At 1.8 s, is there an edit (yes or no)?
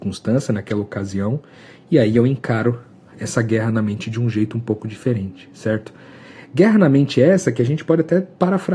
no